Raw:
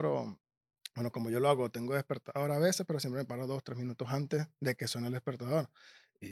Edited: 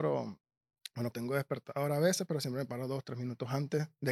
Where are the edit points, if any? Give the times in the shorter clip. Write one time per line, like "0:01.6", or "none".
0:01.1